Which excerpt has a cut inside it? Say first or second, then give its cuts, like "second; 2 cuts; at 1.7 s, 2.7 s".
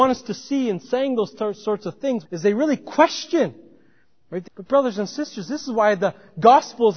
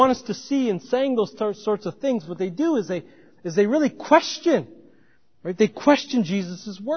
first; 2 cuts; at 2.2 s, 4.4 s